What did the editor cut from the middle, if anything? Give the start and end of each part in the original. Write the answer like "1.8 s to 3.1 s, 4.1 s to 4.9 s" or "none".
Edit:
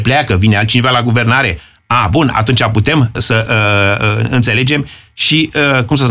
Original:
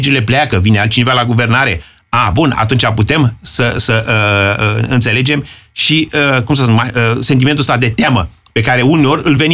3.4 s to 3.7 s